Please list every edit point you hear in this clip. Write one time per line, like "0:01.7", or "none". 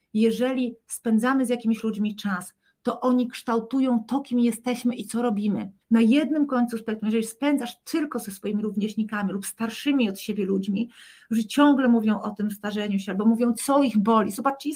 0:05.8